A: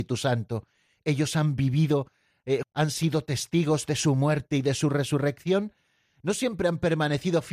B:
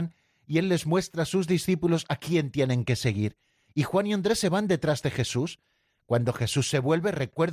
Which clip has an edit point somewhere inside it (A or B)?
A